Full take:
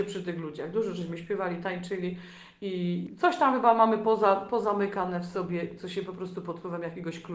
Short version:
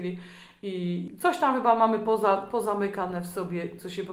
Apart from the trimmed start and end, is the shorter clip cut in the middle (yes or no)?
no